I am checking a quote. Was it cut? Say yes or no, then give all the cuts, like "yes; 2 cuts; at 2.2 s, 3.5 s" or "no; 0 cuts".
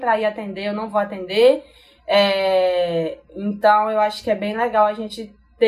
no; 0 cuts